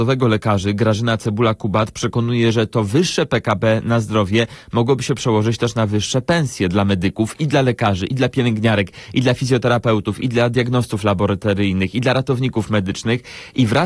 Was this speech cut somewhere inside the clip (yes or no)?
no